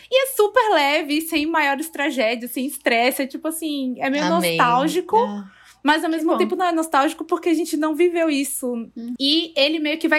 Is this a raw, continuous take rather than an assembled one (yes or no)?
no